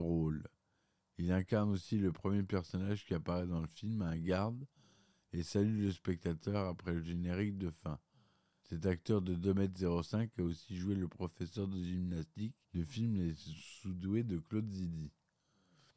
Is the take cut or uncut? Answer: cut